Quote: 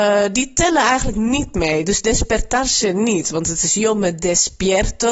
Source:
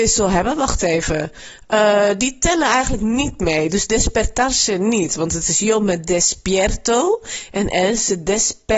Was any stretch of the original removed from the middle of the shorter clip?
no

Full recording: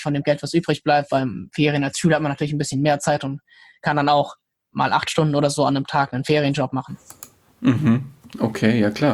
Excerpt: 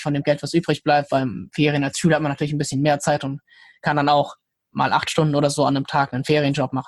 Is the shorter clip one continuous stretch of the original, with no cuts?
yes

